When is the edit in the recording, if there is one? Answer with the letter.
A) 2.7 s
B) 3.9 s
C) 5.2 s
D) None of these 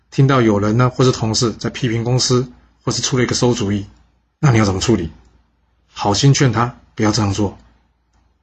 D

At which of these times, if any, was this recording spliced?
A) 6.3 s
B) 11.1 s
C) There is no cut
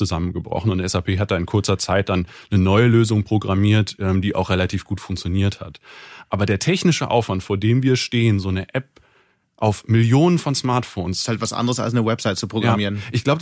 C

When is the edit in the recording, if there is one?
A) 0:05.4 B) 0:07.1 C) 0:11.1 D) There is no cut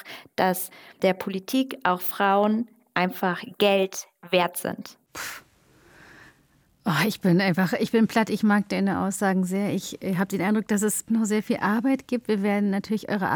C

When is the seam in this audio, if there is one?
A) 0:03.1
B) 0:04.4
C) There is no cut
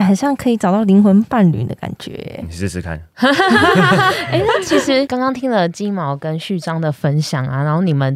C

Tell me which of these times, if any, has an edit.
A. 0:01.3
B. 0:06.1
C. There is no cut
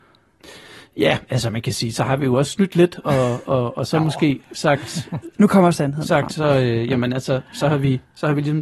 C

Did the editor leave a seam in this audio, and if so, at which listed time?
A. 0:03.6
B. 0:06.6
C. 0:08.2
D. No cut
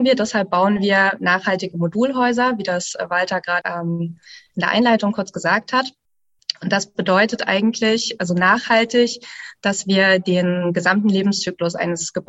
A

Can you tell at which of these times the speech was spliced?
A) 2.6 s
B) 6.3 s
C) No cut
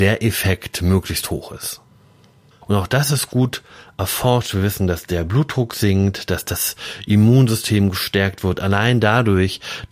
A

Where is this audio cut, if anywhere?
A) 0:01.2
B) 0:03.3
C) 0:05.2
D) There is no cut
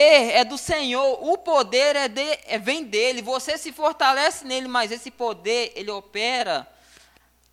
D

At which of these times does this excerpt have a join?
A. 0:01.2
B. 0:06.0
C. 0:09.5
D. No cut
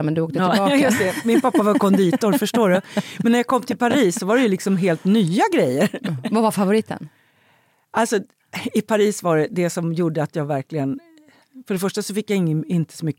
C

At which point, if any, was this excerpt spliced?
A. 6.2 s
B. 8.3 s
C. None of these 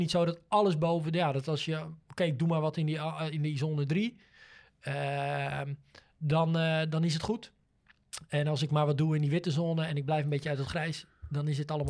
C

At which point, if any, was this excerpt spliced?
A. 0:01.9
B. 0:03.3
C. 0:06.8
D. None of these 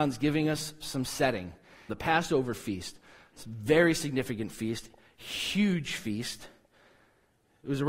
A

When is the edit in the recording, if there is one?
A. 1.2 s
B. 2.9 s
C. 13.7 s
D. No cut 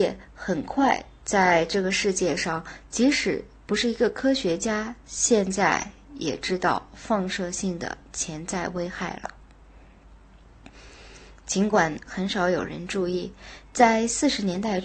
A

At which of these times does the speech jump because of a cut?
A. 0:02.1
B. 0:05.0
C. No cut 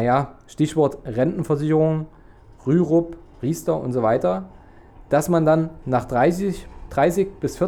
C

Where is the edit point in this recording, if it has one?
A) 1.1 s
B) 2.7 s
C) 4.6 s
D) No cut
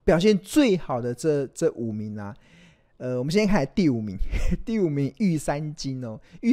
D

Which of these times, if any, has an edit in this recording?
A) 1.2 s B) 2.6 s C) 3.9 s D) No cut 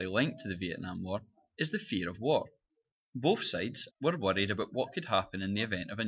C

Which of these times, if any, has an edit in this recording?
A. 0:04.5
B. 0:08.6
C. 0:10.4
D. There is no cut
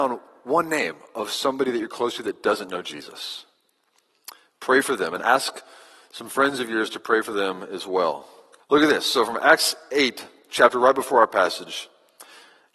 B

